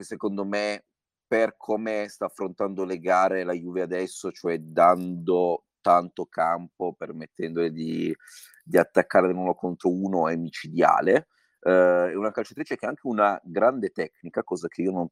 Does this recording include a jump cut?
no; 0 cuts

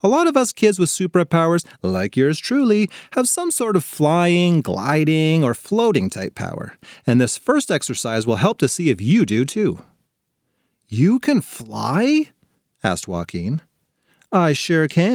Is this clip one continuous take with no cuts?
yes; 0 cuts

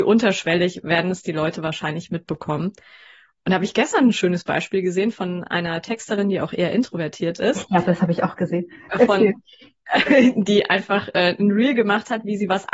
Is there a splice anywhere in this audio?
no; 0 cuts

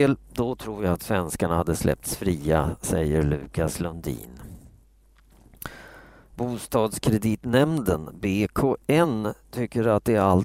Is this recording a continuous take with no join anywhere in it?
no; 1 cut; at 6.2 s

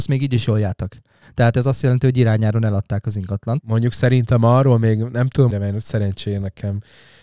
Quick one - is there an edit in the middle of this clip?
yes; 2 cuts; at 3.6 s, 5.5 s

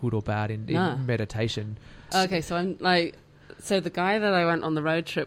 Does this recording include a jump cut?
yes; 1 cut; at 2.1 s

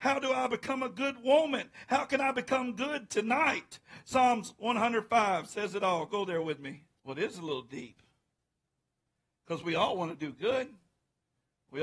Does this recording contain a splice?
yes; 1 cut; at 7.0 s

